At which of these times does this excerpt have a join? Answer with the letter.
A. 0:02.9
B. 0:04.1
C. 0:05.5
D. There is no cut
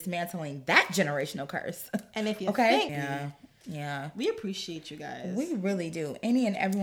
A